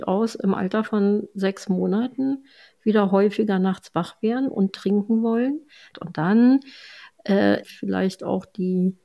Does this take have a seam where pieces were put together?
yes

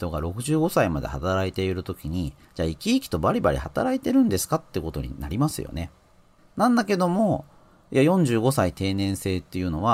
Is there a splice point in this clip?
yes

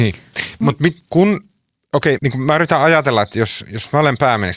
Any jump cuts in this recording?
yes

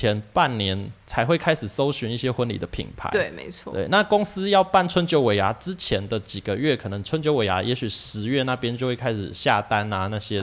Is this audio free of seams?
yes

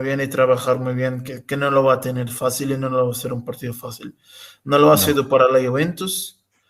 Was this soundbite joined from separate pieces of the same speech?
no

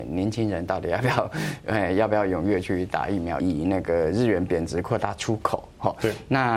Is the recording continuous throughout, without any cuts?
no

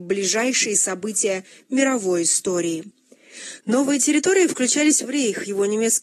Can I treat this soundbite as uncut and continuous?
no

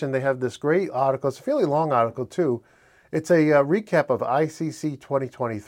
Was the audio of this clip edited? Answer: no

